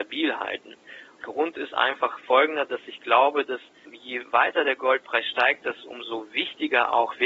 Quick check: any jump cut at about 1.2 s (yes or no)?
yes